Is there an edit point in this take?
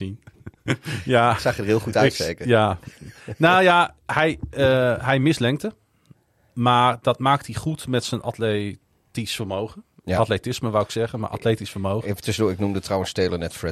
no; 0 cuts

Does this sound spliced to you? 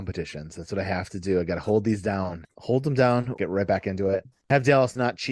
yes; 1 cut; at 3.4 s

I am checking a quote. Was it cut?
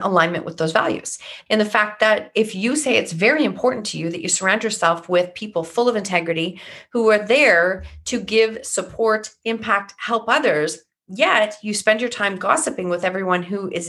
yes; 1 cut; at 1.5 s

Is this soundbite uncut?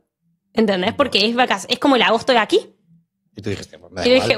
no; 1 cut; at 3.3 s

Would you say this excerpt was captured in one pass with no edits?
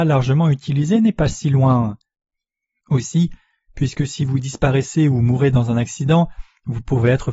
no; 1 cut; at 2.8 s

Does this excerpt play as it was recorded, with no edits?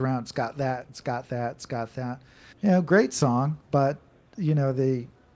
no; 2 cuts; at 2.5 s, 3.6 s

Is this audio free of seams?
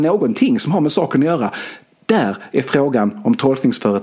yes; 0 cuts

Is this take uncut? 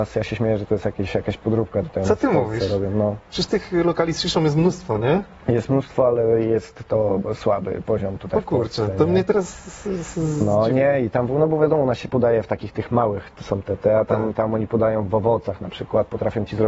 yes; 0 cuts

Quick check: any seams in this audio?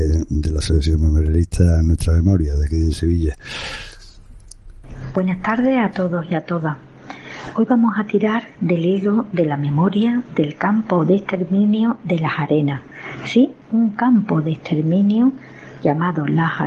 yes; 1 cut; at 13.6 s

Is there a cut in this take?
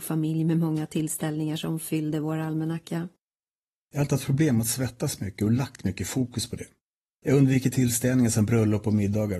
yes; 2 cuts; at 3.7 s, 7.1 s

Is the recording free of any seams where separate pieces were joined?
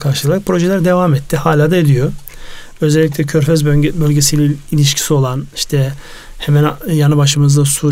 yes; 0 cuts

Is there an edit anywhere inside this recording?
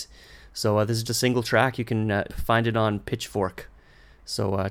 yes; 2 cuts; at 1.0 s, 2.3 s

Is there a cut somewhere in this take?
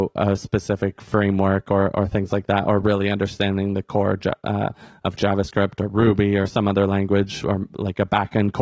no; 0 cuts

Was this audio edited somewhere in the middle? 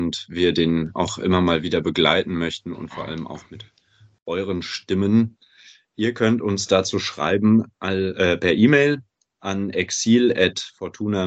no; 0 cuts

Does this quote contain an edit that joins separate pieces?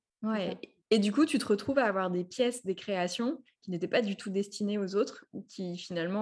no; 0 cuts

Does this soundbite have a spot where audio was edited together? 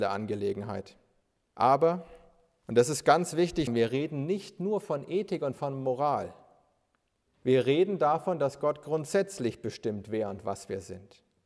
yes; 2 cuts; at 1.5 s, 3.7 s

